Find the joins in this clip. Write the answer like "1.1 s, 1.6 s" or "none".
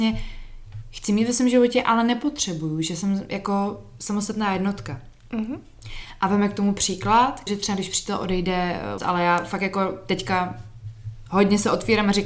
7.5 s, 9.0 s